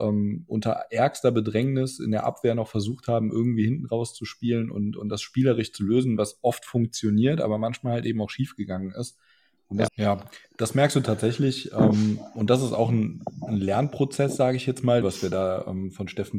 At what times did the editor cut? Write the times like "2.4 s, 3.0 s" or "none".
9.9 s, 15.0 s